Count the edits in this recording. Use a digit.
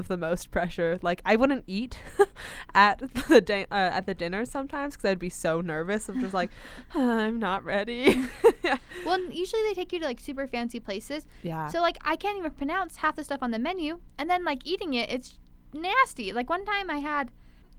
0